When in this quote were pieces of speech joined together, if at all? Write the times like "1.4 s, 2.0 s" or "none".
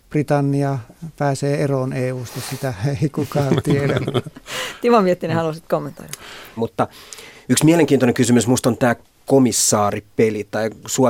6.6 s